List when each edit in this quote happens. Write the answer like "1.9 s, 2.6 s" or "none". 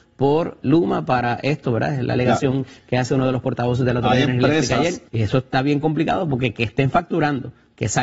5.1 s